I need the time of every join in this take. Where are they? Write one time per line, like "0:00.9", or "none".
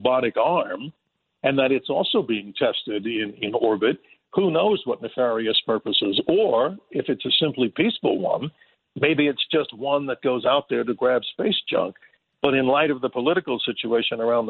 none